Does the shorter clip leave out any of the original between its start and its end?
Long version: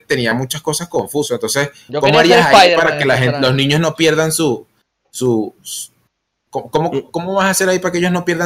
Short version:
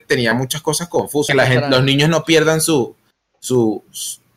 yes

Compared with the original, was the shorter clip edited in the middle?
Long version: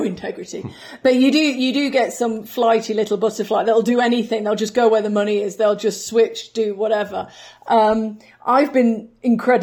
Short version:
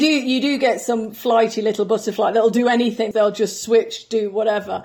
yes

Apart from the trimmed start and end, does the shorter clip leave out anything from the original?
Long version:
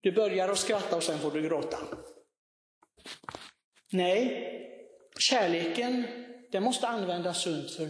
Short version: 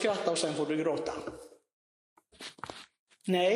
no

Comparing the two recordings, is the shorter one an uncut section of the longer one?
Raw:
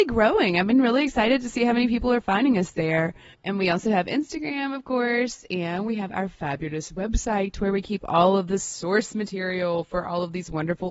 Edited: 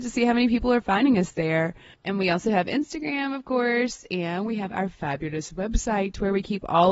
yes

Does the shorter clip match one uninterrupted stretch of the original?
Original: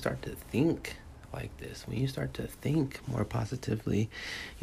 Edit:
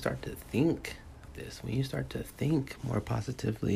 no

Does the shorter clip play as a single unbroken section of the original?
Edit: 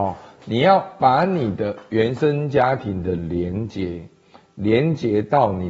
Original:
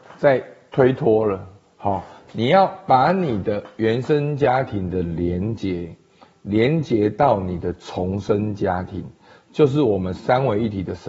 yes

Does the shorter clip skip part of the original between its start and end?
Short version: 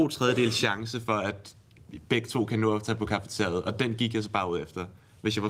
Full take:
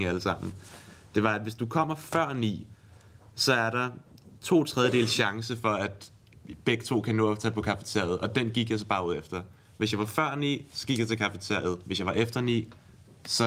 no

